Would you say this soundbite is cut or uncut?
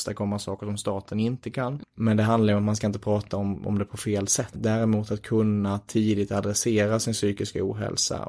cut